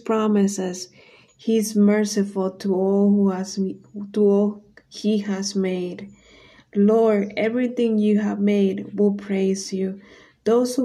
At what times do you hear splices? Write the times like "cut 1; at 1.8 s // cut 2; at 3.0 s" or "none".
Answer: cut 1; at 1.3 s